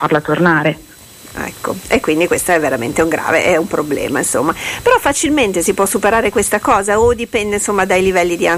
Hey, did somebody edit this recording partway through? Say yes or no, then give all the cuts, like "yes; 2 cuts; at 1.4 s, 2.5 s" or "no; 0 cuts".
no; 0 cuts